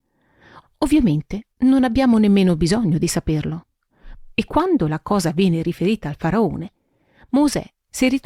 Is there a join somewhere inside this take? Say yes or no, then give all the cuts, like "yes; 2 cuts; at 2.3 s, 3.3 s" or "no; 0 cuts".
yes; 1 cut; at 4.3 s